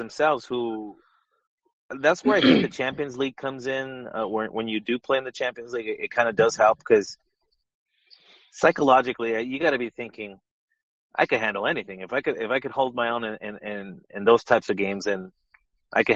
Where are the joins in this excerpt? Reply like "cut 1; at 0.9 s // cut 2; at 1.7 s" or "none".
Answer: none